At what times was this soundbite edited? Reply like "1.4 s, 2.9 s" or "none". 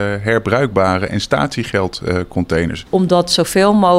2.9 s